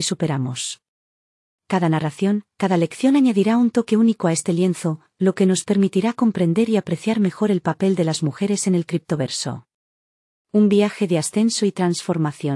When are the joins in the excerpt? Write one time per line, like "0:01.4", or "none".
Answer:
0:02.5

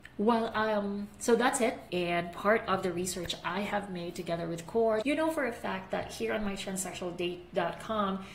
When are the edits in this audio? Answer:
0:01.9
0:05.0

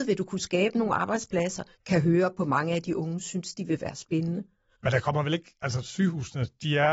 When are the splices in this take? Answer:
0:01.8

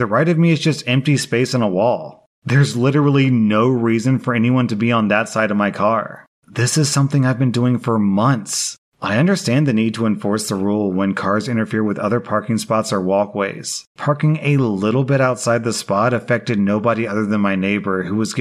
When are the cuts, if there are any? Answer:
0:14.0

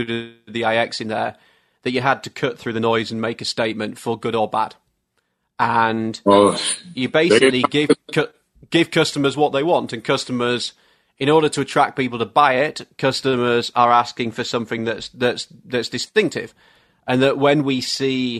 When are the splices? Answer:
none

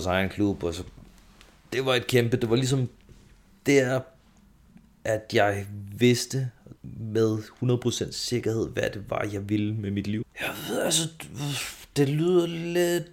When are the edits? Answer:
0:06.8
0:10.2

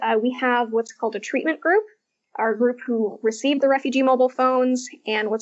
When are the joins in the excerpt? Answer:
none

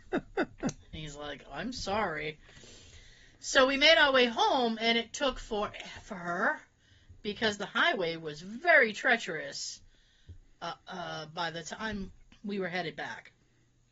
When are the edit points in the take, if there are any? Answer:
none

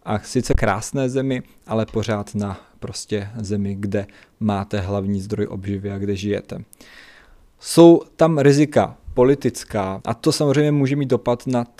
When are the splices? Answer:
0:10.0

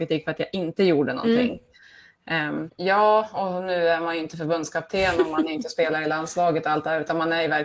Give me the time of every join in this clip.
0:02.7

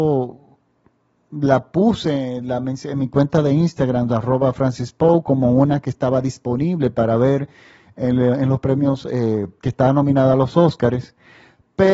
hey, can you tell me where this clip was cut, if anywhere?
none

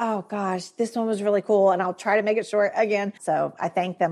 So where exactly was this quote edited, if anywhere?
0:03.2

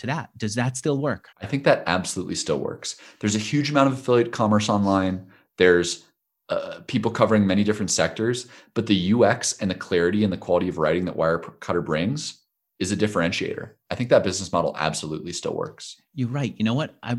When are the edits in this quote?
0:01.3

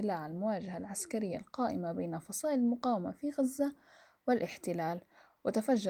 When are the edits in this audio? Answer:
none

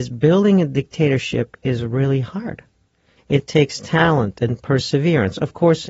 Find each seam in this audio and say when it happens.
0:03.2

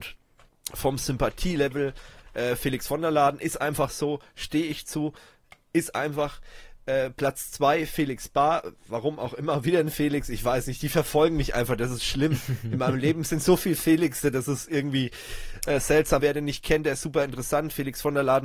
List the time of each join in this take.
0:16.2

